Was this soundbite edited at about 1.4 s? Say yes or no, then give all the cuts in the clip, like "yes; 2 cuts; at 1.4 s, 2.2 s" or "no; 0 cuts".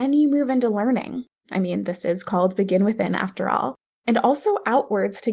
yes; 1 cut; at 1.4 s